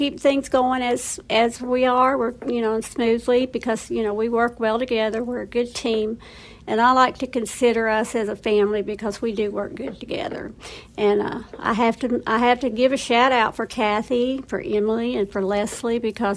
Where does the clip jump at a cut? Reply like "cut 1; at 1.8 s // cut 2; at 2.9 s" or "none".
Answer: none